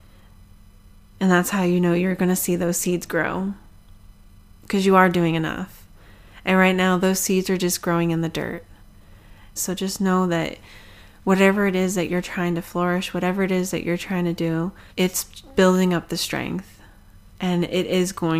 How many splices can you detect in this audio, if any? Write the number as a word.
two